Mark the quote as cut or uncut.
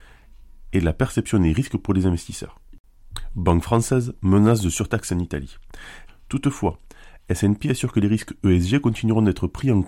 cut